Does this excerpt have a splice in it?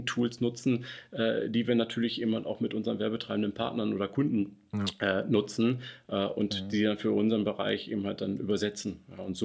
no; 0 cuts

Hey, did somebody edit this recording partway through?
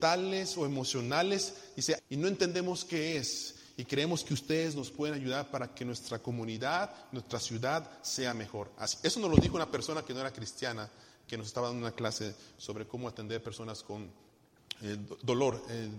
yes; 1 cut; at 2.0 s

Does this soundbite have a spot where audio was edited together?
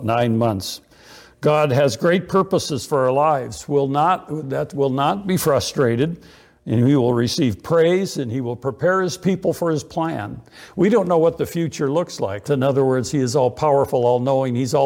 yes; 1 cut; at 12.5 s

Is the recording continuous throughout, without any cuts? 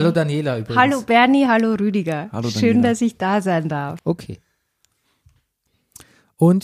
no; 1 cut; at 4.0 s

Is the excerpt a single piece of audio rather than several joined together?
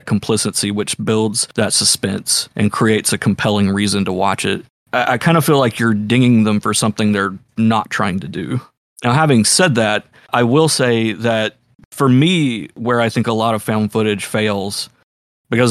yes; 0 cuts

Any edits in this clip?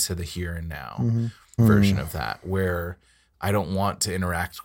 yes; 1 cut; at 1.6 s

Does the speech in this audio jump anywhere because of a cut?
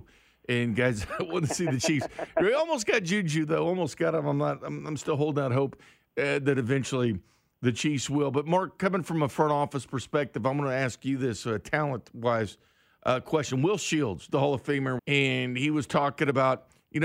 yes; 1 cut; at 15.0 s

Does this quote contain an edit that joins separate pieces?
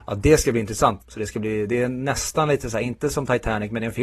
yes; 1 cut; at 1.0 s

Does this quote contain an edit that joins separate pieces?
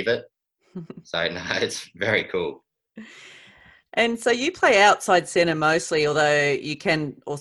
no; 0 cuts

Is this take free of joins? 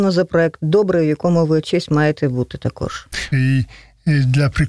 no; 1 cut; at 3.3 s

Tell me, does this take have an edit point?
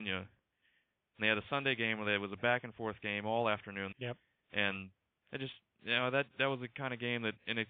yes; 1 cut; at 3.9 s

